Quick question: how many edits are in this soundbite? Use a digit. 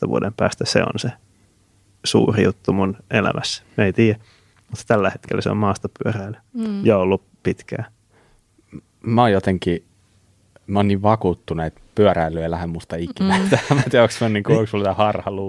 0